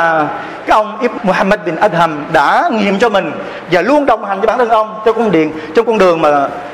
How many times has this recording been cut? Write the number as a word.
one